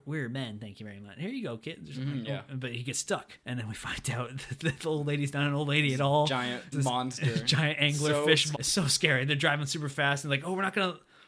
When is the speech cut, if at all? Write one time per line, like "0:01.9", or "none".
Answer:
0:03.4
0:06.7
0:08.5